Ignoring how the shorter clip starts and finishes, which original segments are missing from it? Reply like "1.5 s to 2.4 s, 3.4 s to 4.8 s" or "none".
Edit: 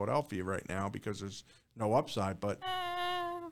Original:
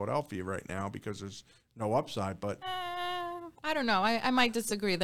none